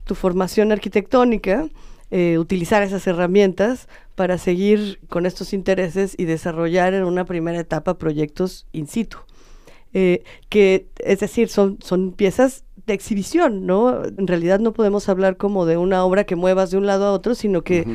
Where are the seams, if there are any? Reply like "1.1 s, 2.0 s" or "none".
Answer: 5.1 s, 14.2 s